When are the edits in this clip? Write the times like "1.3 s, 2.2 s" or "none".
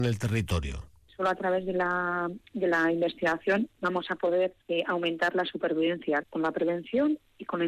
4.6 s, 6.2 s